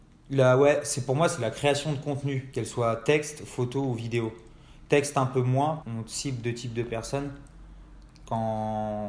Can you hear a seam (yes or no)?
yes